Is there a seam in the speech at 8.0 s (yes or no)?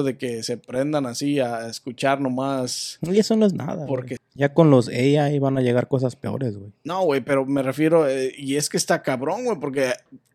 no